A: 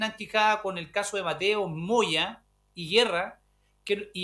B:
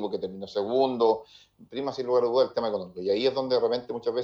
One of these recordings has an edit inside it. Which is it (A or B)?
B